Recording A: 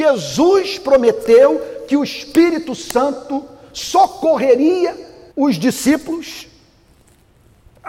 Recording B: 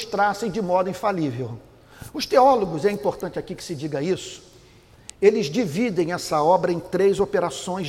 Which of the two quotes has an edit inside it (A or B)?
A